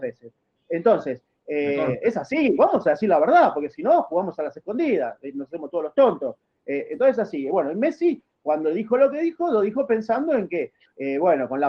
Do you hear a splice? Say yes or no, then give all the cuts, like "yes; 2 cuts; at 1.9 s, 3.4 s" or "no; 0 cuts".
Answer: no; 0 cuts